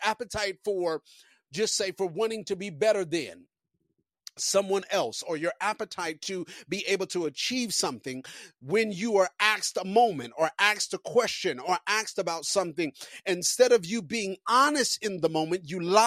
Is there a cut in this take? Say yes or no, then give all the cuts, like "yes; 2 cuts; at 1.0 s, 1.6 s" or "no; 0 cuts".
no; 0 cuts